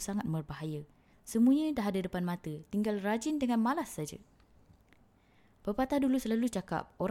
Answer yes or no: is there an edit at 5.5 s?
no